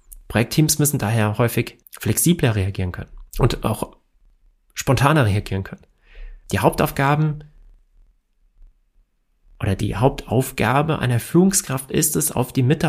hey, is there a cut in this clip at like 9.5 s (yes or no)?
no